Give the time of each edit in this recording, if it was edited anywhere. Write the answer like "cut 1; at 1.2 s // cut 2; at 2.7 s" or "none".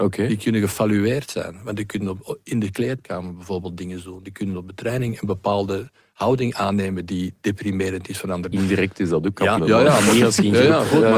cut 1; at 8.5 s // cut 2; at 9.6 s